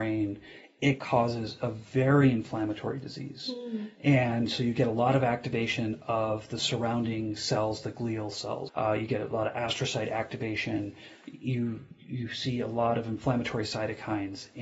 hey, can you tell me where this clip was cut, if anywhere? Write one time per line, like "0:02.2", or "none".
0:08.7